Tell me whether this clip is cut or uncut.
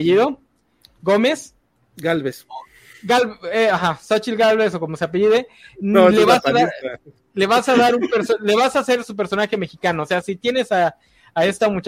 uncut